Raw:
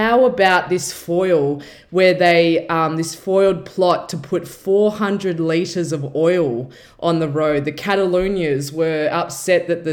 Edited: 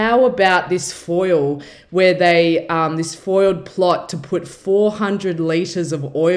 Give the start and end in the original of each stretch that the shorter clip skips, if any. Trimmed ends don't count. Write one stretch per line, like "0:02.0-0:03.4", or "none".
none